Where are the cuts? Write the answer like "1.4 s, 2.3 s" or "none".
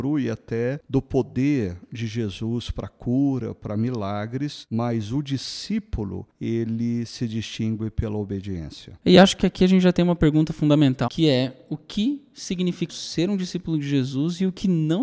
9.0 s, 11.1 s, 12.9 s